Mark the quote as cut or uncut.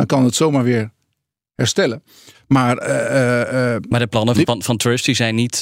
cut